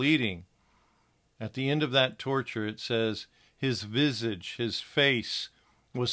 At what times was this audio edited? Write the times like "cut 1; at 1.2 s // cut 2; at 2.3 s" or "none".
cut 1; at 1.2 s